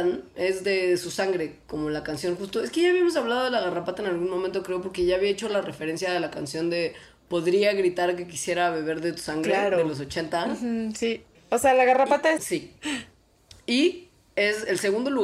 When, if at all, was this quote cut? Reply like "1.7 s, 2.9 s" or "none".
11.3 s, 12.4 s